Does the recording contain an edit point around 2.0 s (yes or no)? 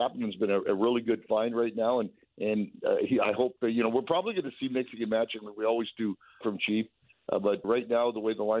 no